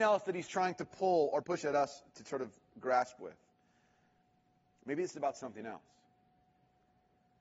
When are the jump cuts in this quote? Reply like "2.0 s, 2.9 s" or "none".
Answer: 1.4 s